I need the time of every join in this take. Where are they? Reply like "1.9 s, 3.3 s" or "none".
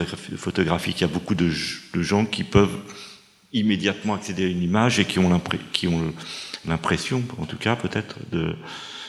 none